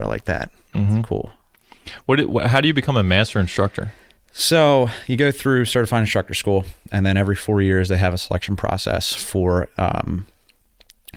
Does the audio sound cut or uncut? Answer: uncut